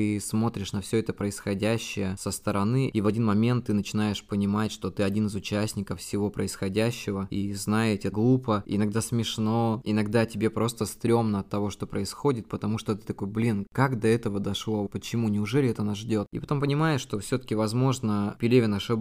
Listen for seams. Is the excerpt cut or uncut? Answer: cut